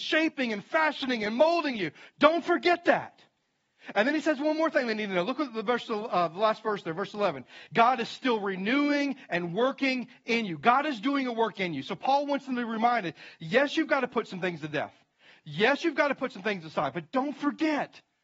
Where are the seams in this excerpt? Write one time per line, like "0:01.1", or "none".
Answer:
0:07.7